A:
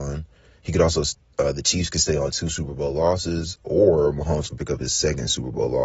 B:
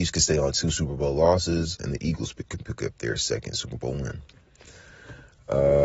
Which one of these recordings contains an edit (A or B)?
B